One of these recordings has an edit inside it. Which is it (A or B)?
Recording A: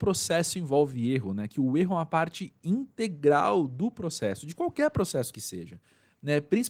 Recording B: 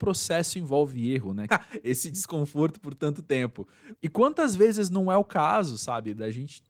B